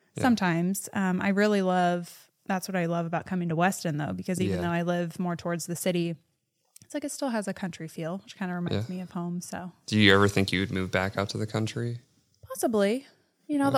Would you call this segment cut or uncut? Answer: uncut